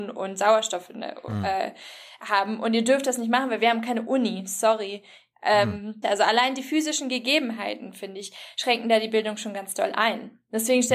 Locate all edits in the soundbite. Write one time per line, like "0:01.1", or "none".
0:06.0